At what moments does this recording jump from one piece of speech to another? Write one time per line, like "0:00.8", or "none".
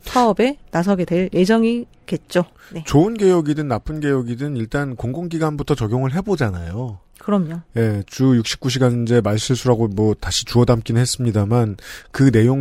none